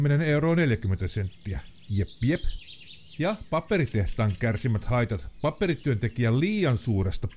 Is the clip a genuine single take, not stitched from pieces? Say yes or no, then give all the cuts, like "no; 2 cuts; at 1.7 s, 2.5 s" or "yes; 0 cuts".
no; 1 cut; at 1.9 s